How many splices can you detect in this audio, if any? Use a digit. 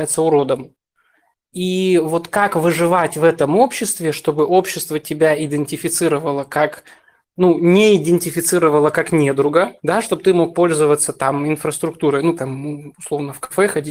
2